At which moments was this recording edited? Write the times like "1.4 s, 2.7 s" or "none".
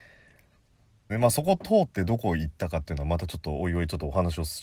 1.1 s